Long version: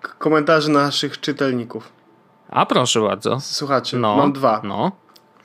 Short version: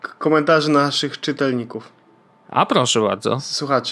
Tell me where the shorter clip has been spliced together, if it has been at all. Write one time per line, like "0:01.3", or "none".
none